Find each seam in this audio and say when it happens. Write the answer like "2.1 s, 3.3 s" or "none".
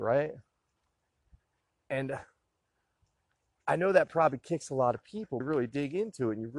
5.4 s